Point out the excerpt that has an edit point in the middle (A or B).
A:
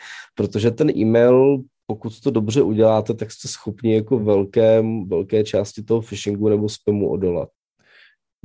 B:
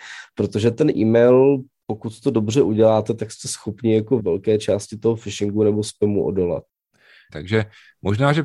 B